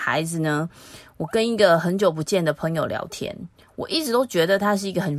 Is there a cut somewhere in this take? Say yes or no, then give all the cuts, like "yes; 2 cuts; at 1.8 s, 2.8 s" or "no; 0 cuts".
no; 0 cuts